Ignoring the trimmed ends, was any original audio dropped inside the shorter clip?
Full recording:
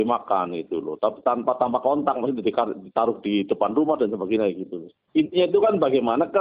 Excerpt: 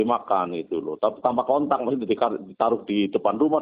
yes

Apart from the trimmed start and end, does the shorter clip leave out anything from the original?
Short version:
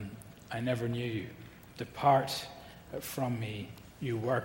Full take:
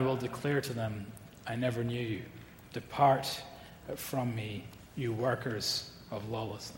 no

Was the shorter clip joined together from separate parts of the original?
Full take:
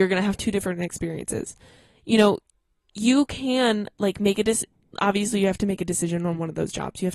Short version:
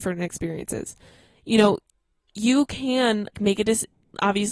yes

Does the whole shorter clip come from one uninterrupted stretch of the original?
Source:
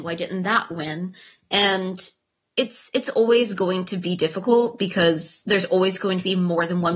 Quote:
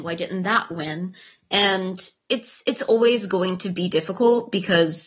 no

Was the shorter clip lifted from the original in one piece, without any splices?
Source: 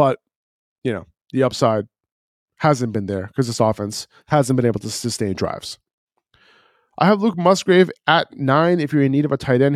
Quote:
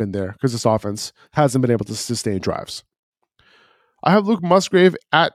yes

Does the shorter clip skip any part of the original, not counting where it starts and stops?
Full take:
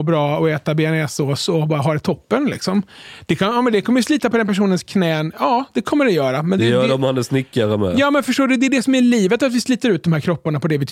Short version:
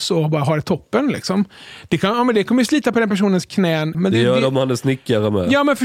yes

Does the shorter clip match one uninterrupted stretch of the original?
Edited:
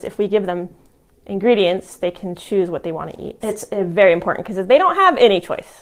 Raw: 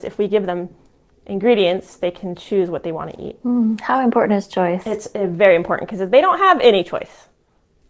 no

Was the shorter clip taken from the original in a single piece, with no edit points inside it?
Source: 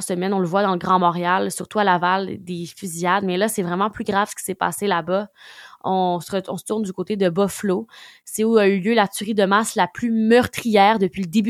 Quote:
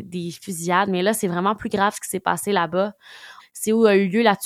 no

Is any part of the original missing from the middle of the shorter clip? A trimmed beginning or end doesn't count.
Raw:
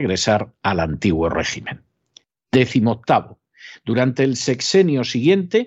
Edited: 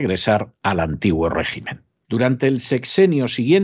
yes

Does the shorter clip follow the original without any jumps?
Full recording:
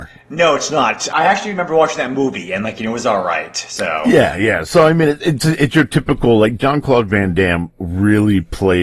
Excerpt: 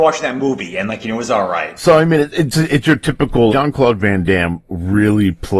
no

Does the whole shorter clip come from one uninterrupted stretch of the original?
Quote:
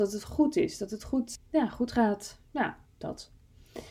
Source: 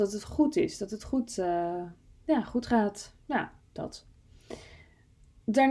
no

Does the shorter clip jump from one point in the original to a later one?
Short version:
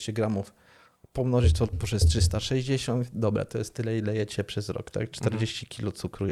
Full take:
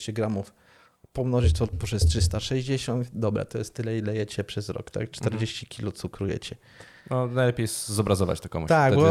no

